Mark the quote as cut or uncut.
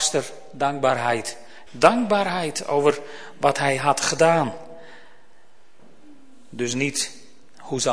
cut